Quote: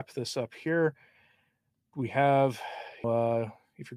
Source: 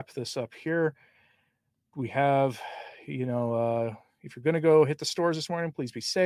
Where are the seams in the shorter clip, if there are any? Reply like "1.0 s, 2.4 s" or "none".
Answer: 3.0 s